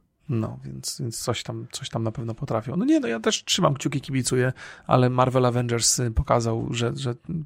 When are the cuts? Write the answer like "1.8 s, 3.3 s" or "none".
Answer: none